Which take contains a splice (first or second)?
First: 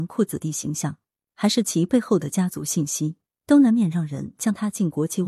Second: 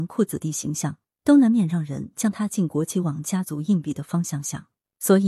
second